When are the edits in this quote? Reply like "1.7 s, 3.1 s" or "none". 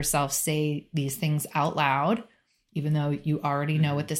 none